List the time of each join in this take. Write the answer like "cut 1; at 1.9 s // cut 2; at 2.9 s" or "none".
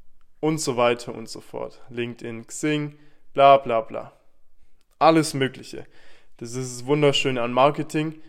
none